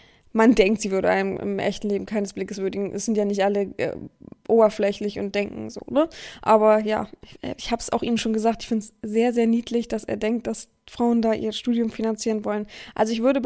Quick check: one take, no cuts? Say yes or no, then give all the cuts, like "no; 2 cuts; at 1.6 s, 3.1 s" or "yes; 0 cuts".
yes; 0 cuts